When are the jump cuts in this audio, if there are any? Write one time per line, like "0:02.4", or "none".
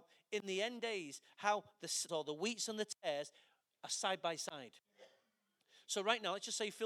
0:02.1